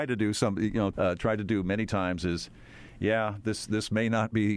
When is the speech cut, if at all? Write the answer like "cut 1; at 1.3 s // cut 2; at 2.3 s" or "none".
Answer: cut 1; at 0.9 s